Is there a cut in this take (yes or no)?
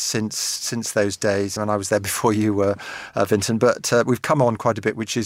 no